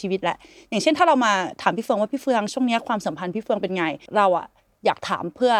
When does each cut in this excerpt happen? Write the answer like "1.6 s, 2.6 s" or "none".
4.1 s